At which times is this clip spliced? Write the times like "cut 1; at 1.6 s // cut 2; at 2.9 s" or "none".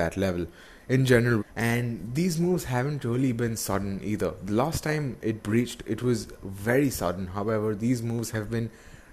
cut 1; at 1.4 s